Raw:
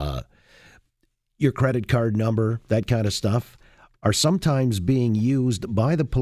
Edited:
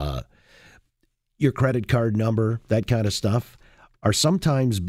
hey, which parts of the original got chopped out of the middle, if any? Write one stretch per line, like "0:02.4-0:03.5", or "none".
none